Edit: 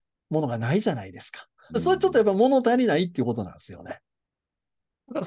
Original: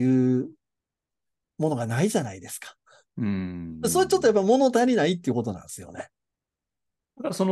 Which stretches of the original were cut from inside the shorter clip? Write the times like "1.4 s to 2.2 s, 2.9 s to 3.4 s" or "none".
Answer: 3.0 s to 3.8 s